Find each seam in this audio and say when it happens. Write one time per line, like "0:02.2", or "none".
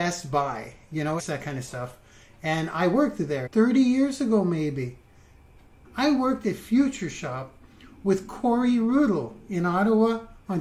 0:01.2
0:03.5
0:05.8